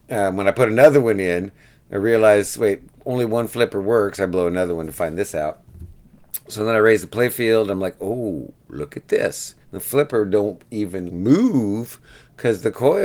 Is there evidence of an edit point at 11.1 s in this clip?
yes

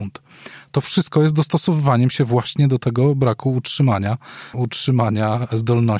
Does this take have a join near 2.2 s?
no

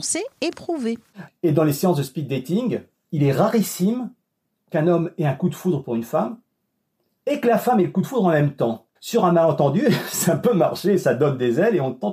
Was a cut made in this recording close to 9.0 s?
yes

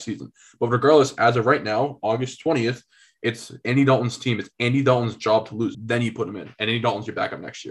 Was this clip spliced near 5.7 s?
yes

